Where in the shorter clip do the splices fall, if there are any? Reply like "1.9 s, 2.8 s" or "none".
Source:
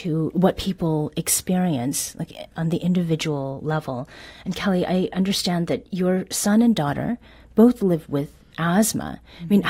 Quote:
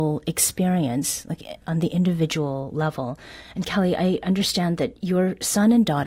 none